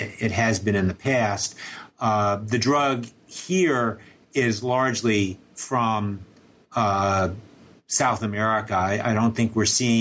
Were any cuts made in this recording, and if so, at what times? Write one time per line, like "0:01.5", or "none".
none